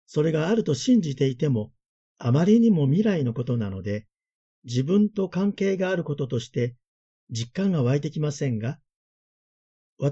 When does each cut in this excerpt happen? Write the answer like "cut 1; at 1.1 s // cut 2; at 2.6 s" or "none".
none